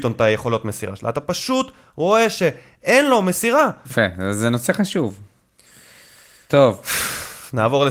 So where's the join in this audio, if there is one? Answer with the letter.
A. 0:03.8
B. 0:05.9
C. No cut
A